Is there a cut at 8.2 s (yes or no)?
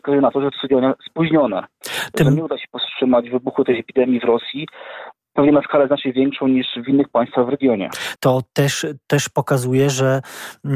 yes